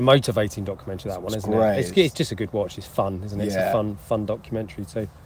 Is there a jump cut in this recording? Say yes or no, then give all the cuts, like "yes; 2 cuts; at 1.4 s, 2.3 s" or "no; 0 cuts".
no; 0 cuts